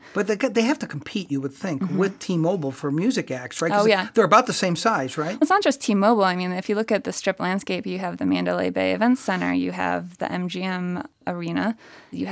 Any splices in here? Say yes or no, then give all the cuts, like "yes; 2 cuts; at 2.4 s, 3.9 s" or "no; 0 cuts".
yes; 1 cut; at 5.4 s